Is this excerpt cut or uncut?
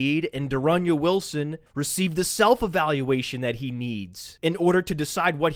uncut